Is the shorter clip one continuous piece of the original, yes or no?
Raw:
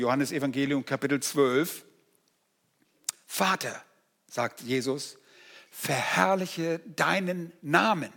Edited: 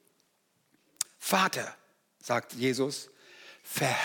yes